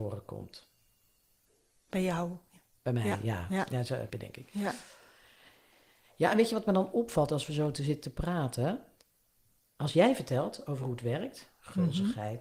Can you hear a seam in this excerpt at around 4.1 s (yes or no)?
yes